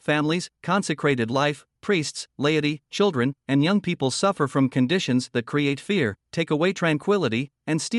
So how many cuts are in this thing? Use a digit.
0